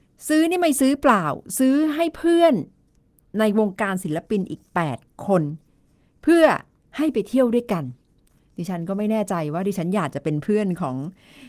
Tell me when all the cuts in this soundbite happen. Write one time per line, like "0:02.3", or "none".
none